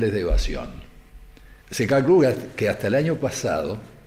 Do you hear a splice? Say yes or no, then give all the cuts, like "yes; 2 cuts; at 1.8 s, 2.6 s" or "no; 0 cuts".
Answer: yes; 1 cut; at 1.6 s